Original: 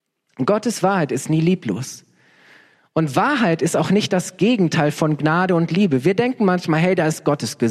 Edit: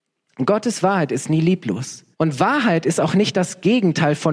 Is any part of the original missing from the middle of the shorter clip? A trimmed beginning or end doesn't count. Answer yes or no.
yes